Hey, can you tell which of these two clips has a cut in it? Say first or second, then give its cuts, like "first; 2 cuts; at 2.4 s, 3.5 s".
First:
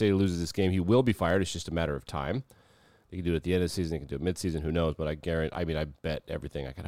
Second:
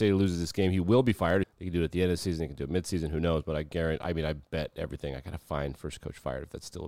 second; 1 cut; at 1.4 s